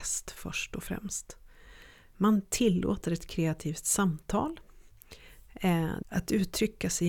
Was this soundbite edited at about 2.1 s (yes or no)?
yes